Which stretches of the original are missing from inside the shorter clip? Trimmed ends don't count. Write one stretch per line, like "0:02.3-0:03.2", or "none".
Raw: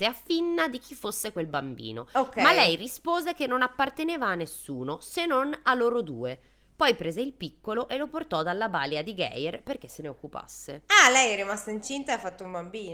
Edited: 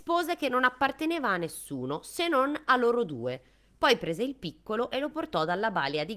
none